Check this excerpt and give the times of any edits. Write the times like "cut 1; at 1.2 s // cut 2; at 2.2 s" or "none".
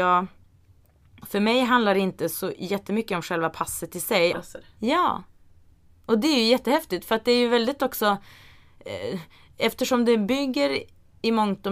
cut 1; at 4.3 s